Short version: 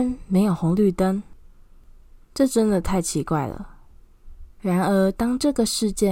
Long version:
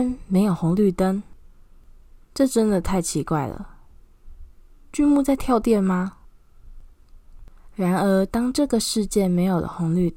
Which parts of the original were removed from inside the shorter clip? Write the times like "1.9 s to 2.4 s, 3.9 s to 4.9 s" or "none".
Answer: 4.6 s to 7.7 s